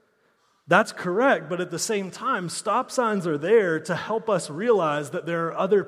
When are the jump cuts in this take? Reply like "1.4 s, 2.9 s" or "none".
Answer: none